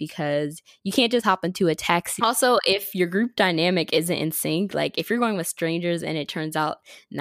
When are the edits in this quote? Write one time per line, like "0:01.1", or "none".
0:02.2